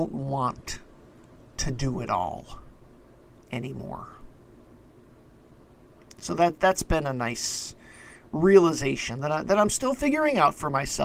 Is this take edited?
no; 0 cuts

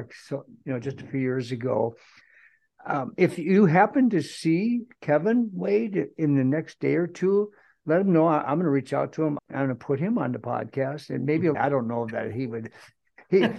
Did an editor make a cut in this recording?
yes; 2 cuts; at 9.4 s, 11.5 s

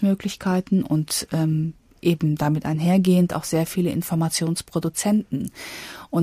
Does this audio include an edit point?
no; 0 cuts

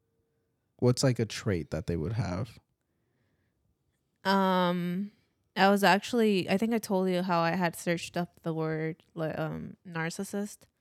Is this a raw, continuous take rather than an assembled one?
yes; 0 cuts

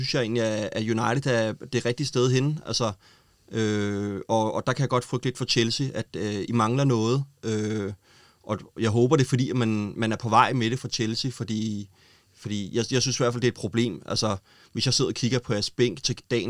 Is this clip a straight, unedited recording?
no; 1 cut; at 6.5 s

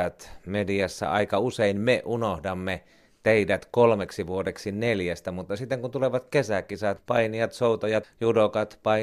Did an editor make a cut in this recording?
yes; 2 cuts; at 7.0 s, 8.0 s

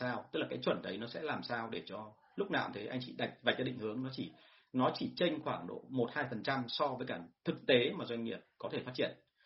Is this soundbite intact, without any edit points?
yes; 0 cuts

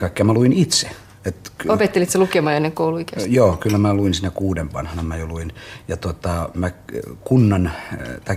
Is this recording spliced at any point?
no; 0 cuts

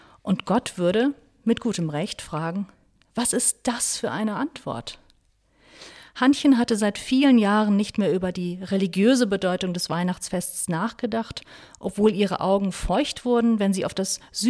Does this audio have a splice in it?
no; 0 cuts

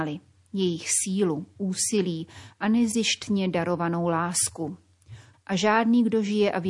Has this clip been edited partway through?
yes; 1 cut; at 5.3 s

